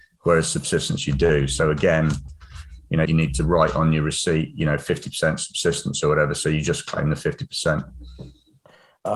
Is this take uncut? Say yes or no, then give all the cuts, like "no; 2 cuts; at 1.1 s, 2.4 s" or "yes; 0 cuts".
no; 1 cut; at 3.1 s